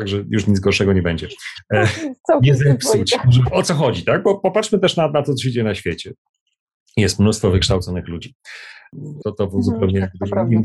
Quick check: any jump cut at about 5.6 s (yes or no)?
no